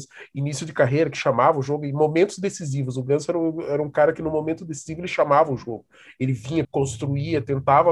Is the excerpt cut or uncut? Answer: cut